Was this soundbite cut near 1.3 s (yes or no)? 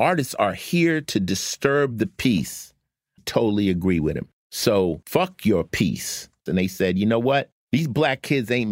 no